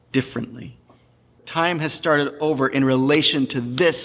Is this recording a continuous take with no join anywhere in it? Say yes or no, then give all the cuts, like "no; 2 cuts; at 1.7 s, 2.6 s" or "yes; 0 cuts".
no; 1 cut; at 1.4 s